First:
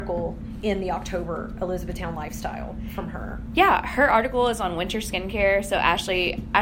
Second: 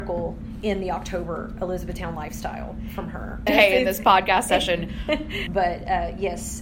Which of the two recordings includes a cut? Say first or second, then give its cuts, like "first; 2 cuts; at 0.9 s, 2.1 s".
second; 2 cuts; at 3.5 s, 5.5 s